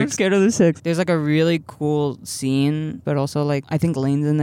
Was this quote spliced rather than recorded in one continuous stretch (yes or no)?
yes